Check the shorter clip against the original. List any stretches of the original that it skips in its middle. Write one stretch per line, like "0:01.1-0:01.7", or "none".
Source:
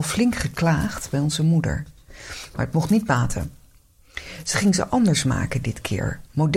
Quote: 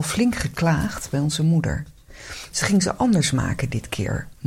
0:02.5-0:04.4